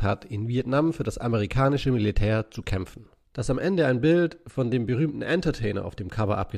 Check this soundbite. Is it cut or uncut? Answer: cut